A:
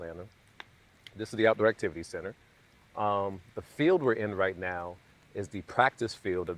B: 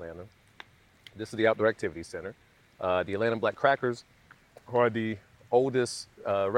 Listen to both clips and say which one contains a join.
B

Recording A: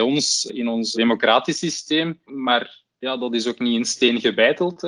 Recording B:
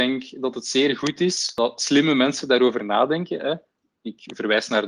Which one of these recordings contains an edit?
A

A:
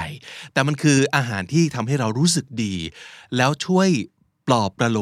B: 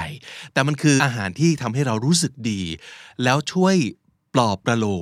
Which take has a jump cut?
B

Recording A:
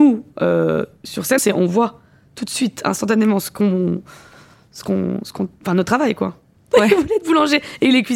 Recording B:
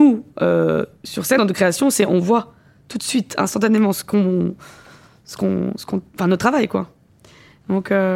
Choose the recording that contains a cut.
A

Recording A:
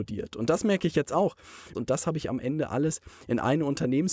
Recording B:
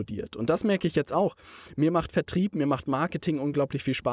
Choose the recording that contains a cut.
A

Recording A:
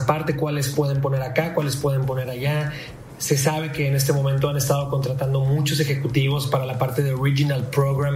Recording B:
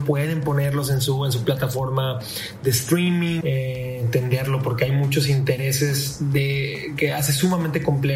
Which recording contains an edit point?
B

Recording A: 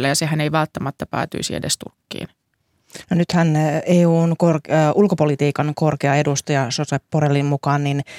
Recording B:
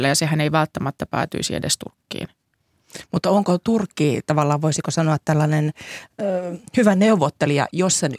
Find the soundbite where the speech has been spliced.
A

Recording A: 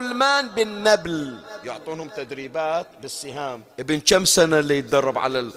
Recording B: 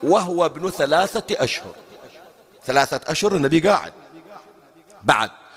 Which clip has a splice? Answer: A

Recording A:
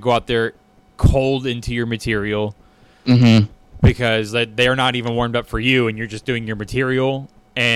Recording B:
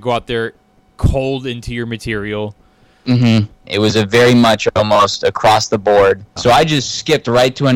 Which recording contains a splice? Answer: B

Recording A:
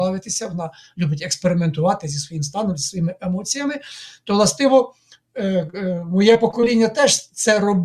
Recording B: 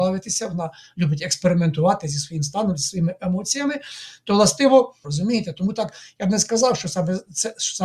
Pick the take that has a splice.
B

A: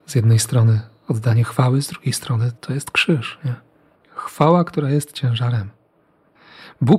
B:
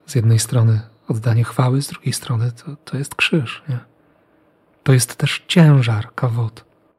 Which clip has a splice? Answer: A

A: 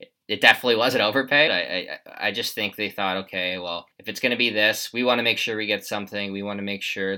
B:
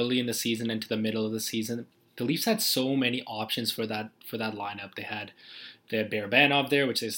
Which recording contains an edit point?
A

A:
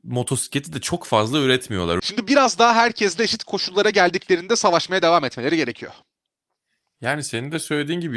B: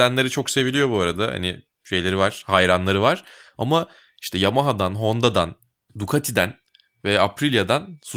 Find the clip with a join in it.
A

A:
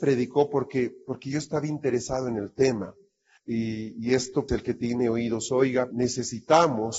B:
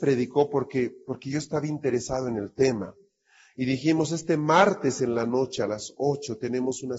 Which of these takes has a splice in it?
A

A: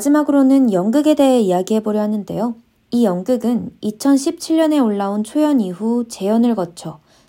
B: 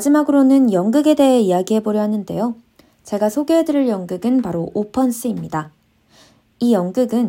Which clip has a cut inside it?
A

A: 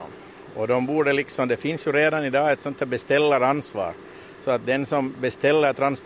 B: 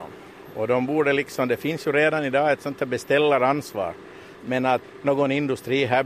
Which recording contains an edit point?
B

